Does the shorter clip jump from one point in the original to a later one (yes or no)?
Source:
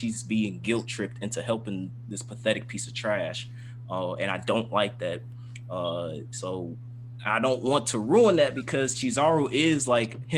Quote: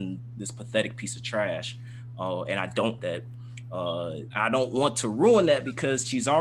yes